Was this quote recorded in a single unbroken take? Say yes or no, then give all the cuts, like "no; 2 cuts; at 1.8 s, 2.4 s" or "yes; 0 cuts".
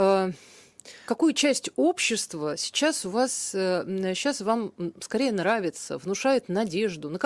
no; 1 cut; at 1.1 s